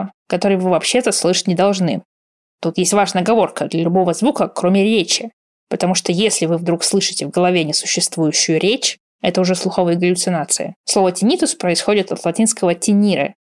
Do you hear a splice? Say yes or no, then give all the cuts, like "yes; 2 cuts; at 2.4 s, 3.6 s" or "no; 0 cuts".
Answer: yes; 1 cut; at 10.8 s